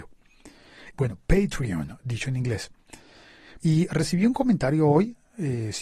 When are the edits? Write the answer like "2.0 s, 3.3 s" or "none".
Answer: 0.9 s, 3.6 s